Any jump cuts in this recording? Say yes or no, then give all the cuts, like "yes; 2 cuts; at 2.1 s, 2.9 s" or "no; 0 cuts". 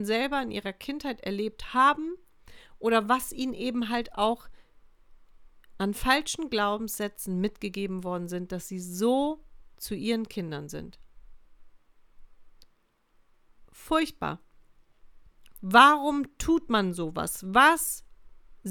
yes; 3 cuts; at 9.7 s, 13.6 s, 15.5 s